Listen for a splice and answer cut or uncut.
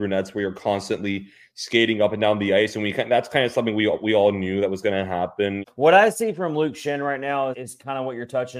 cut